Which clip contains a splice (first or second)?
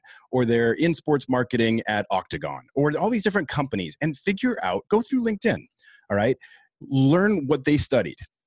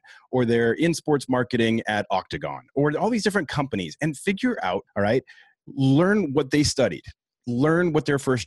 second